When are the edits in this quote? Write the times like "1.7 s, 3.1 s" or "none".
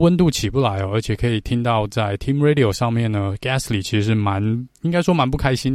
4.7 s